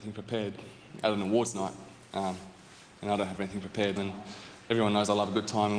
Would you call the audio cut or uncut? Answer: cut